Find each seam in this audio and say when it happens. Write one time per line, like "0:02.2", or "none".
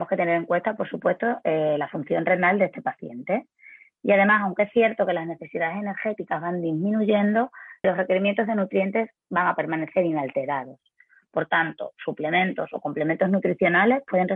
0:07.8